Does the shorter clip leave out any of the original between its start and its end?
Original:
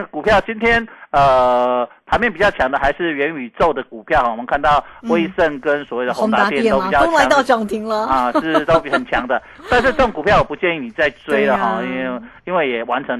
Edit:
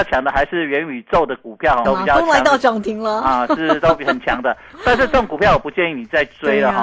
yes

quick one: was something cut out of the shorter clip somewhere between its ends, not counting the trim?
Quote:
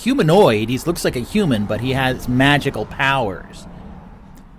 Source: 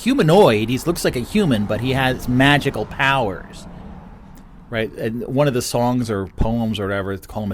no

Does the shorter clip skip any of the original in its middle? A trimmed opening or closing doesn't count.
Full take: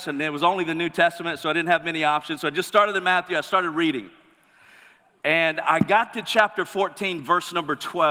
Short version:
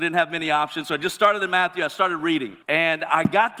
yes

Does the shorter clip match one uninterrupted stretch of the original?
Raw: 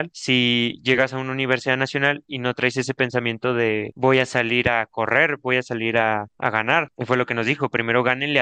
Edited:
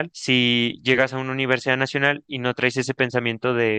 yes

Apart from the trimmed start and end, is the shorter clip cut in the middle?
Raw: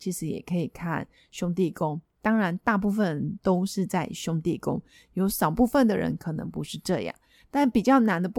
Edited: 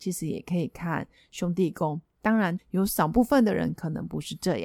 yes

